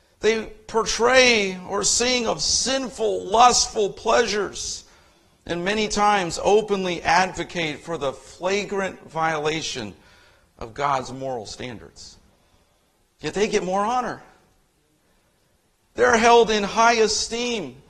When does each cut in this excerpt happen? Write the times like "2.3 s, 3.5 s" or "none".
15.8 s